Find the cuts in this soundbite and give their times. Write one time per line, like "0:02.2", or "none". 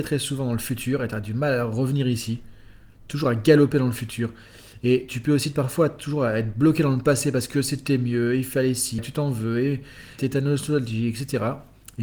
0:09.0
0:10.2